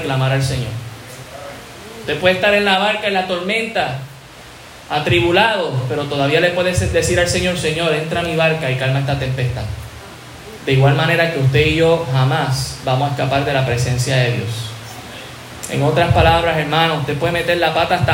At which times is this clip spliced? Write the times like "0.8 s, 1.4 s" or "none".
10.6 s